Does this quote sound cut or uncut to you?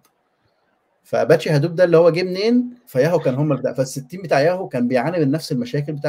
cut